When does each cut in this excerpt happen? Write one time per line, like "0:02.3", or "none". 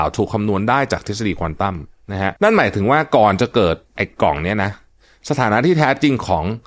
0:02.4
0:03.9